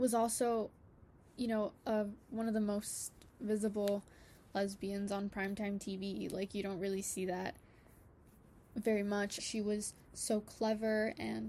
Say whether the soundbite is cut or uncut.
cut